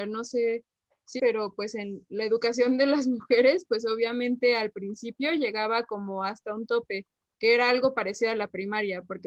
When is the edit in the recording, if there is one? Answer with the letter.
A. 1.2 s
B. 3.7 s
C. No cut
A